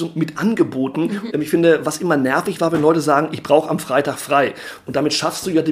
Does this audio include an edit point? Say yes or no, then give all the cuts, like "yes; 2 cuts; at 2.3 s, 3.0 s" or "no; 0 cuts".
yes; 1 cut; at 1.3 s